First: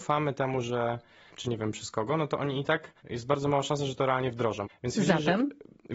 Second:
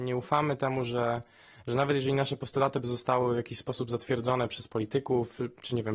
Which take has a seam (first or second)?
first